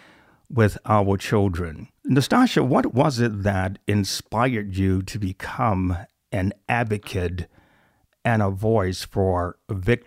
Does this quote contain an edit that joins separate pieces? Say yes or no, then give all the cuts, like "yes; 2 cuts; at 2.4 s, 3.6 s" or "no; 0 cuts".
yes; 1 cut; at 2.0 s